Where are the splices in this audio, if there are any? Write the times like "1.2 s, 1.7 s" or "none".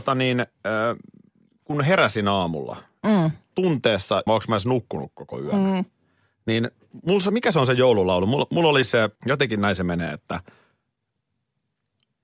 4.3 s, 9.2 s